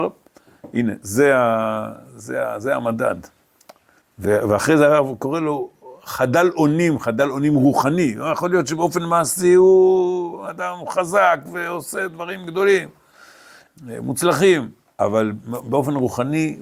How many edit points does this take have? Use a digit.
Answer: 2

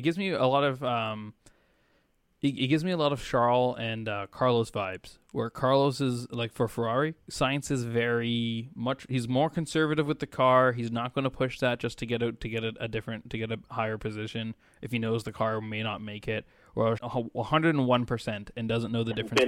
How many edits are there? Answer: 1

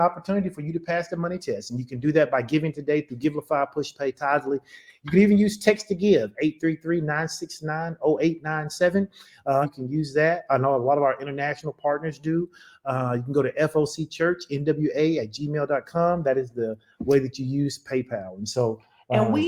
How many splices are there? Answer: 1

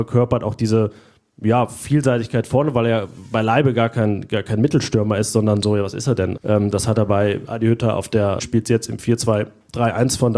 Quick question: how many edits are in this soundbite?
2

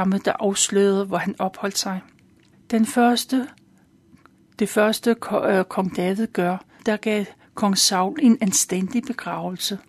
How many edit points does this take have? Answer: 2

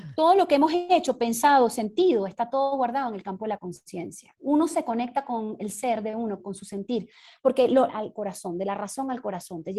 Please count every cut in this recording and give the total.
3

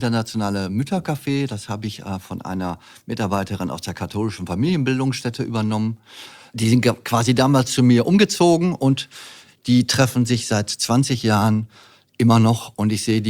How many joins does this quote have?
0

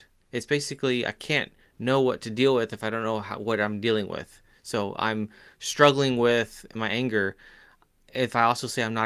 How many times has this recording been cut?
0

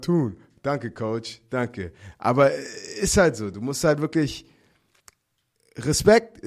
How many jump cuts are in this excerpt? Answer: 0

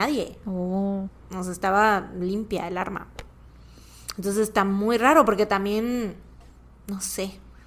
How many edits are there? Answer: 0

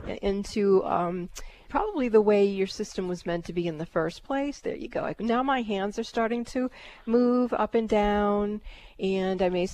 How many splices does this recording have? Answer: 1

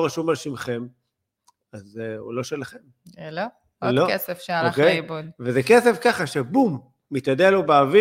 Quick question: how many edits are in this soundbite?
0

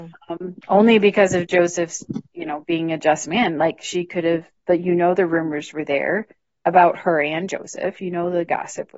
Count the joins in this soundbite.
0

